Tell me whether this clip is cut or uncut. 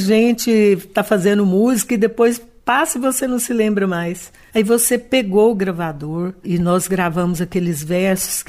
cut